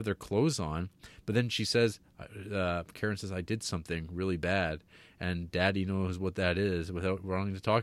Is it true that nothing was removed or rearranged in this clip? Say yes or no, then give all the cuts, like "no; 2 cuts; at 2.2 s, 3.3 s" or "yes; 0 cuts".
yes; 0 cuts